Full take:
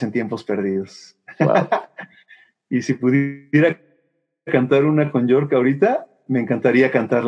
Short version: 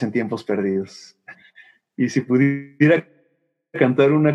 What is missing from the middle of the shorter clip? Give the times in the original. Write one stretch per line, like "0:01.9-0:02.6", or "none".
0:01.3-0:02.1